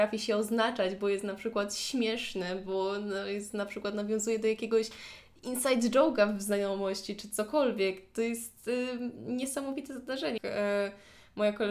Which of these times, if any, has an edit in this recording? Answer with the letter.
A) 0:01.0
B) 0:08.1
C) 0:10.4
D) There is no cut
C